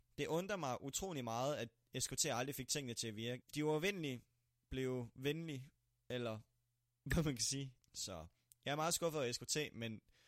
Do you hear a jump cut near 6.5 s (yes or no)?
no